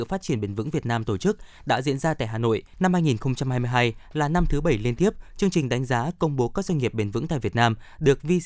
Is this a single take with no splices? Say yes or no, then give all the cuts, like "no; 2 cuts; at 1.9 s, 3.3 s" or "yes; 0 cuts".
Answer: no; 1 cut; at 2.7 s